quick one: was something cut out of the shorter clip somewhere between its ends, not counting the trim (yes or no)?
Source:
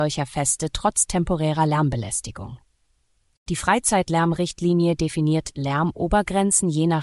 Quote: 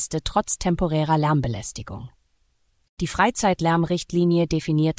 no